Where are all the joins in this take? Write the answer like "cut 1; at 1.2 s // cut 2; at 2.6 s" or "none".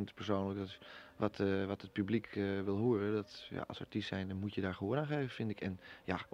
none